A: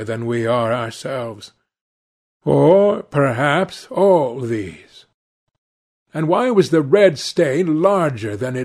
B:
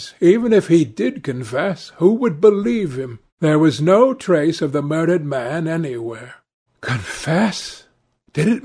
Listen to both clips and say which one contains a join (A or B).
B